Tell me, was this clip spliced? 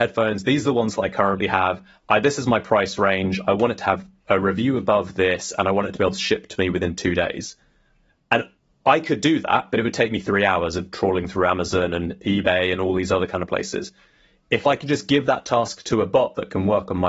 no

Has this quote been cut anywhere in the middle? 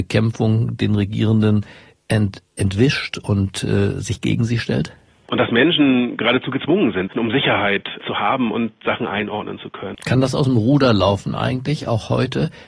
yes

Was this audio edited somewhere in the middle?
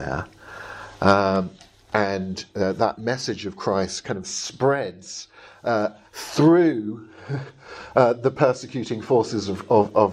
no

